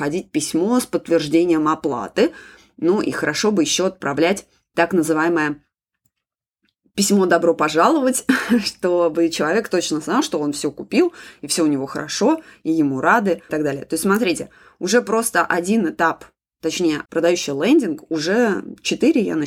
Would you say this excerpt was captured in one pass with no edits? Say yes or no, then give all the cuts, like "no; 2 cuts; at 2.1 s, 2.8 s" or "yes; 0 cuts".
no; 2 cuts; at 13.5 s, 17.1 s